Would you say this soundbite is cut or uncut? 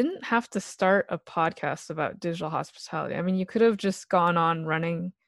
uncut